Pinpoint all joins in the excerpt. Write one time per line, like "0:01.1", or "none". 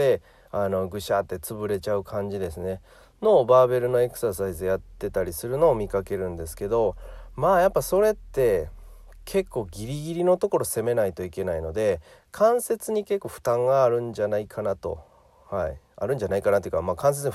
none